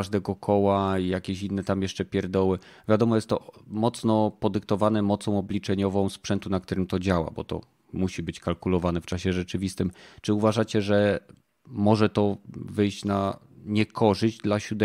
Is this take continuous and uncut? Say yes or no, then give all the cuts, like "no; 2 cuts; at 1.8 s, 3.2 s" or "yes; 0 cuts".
yes; 0 cuts